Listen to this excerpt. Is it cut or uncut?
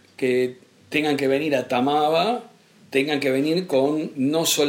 uncut